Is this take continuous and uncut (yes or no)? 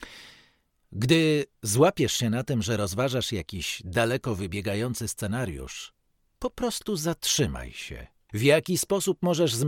no